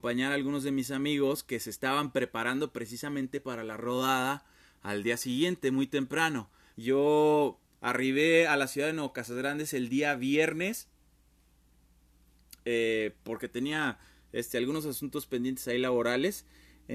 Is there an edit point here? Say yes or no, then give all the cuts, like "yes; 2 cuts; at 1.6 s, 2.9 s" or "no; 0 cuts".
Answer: yes; 1 cut; at 6.7 s